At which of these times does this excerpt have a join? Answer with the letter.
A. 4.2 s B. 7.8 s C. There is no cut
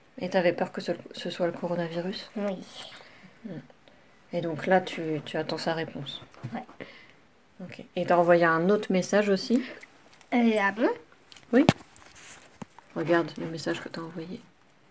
C